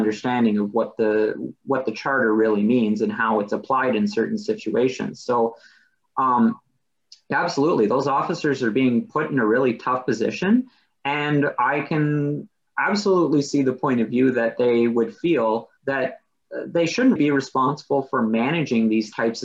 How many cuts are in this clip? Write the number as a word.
two